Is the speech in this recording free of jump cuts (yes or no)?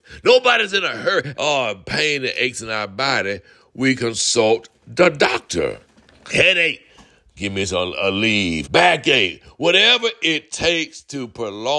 no